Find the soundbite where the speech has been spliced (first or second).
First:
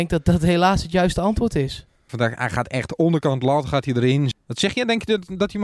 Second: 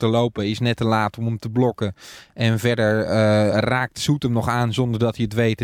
first